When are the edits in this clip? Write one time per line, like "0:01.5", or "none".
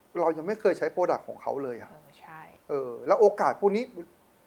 none